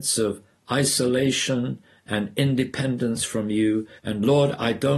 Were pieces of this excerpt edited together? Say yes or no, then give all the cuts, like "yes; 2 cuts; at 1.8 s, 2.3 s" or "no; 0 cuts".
yes; 1 cut; at 4.0 s